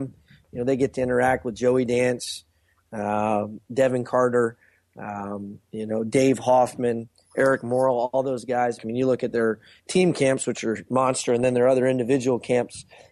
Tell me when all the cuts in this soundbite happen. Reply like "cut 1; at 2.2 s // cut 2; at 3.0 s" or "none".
cut 1; at 8.8 s